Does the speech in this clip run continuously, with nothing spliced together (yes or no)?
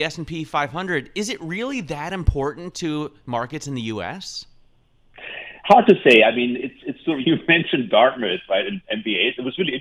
no